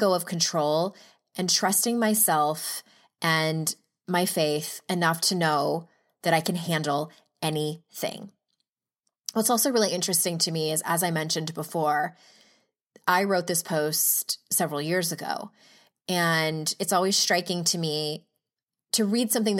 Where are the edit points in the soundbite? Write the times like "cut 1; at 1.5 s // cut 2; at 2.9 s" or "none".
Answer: none